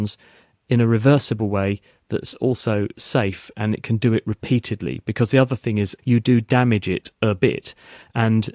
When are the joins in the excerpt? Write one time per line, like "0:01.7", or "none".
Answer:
0:06.0